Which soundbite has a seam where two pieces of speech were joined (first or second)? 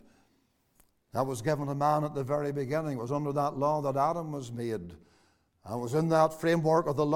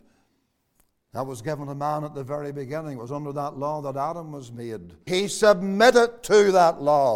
second